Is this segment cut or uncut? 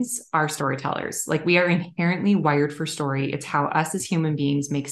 uncut